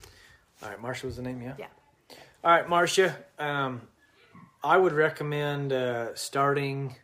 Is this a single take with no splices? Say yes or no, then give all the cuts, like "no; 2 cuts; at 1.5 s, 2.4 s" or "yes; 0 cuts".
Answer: yes; 0 cuts